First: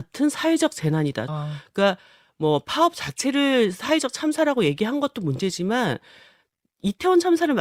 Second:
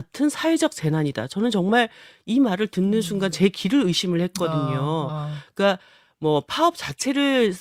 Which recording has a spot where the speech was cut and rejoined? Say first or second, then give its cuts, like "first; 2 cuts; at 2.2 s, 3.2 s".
first; 1 cut; at 1.3 s